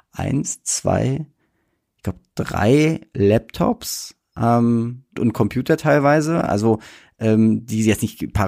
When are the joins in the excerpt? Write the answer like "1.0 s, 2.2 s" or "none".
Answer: 5.2 s